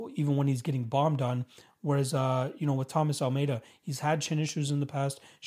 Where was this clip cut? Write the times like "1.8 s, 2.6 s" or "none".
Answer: none